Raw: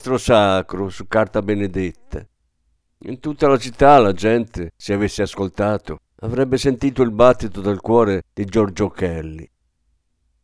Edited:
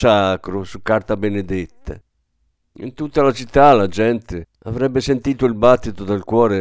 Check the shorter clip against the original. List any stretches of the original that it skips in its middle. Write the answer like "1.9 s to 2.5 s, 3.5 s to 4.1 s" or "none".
4.8 s to 6.1 s